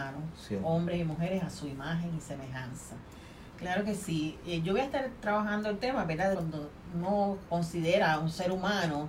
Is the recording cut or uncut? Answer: cut